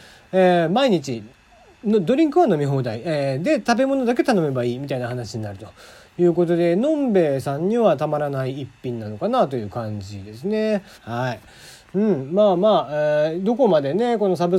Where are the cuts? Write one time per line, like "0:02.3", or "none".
0:10.9

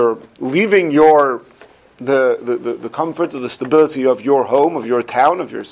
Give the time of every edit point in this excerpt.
none

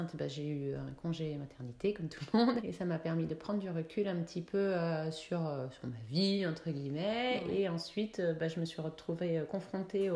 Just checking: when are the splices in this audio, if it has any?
0:02.6

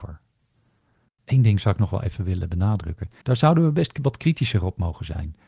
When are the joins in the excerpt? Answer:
0:01.1
0:03.2

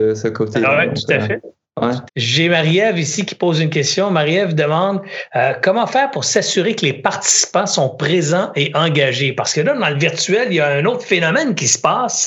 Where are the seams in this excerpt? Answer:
0:02.1

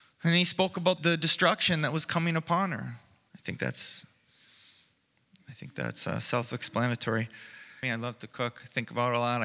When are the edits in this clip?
0:01.0
0:03.3
0:07.8

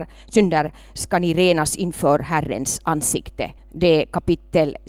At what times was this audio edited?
0:03.6

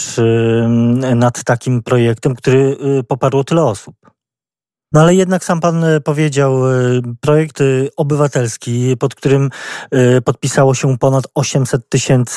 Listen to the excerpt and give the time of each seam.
0:04.9

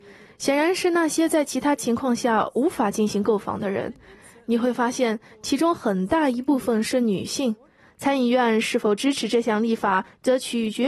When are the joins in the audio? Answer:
0:07.9

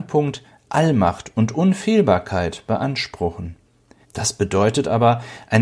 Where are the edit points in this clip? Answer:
0:04.0

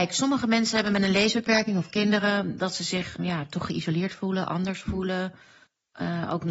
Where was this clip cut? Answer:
0:03.2

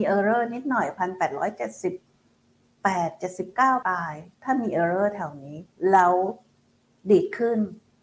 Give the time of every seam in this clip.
0:03.8

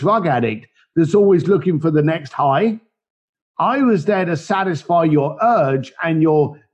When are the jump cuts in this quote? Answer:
none

